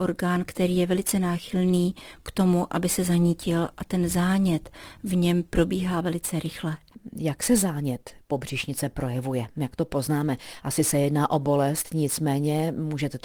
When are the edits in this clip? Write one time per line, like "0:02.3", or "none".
none